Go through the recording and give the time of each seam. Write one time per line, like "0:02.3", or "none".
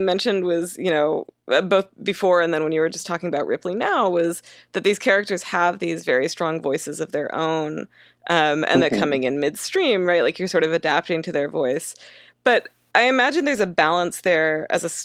none